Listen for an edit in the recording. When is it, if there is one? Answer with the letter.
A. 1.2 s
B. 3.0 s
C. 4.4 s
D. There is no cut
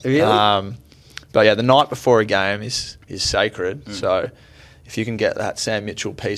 B